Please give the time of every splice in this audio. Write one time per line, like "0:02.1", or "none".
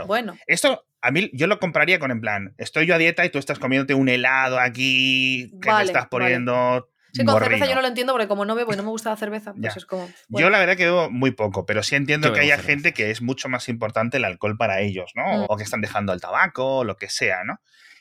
0:15.5